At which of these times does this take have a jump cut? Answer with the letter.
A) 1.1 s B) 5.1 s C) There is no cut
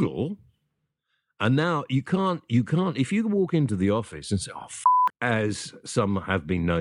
B